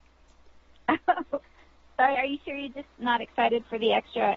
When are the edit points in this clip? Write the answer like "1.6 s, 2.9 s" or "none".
2.1 s